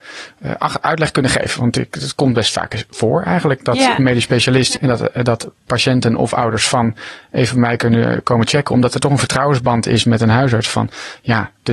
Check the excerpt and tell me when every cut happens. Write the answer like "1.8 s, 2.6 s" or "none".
4.8 s

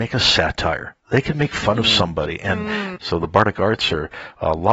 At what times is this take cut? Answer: 3.0 s

